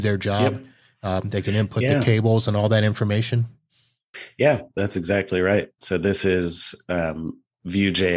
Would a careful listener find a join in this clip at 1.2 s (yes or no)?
no